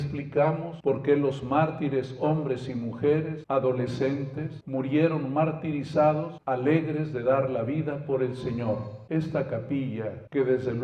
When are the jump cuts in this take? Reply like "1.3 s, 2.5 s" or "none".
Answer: 4.6 s, 6.4 s